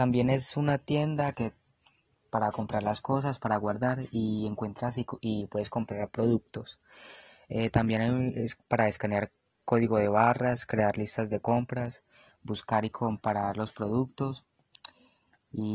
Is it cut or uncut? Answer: cut